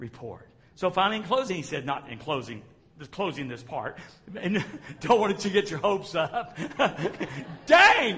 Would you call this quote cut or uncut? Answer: uncut